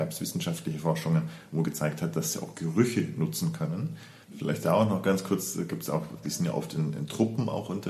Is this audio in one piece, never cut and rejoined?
no; 2 cuts; at 4.2 s, 6.2 s

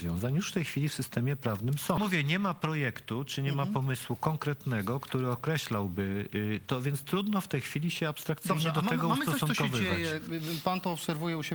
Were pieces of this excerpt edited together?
yes; 1 cut; at 2.0 s

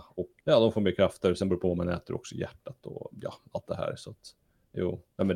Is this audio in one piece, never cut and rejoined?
yes; 0 cuts

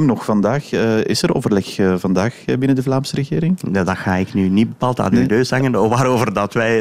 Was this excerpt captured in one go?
yes; 0 cuts

